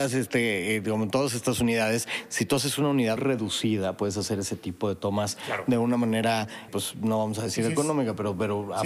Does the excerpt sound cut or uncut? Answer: cut